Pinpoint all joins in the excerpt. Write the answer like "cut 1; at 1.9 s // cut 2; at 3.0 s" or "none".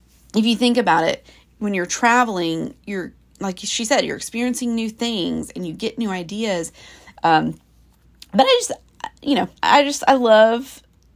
cut 1; at 7.2 s // cut 2; at 9.6 s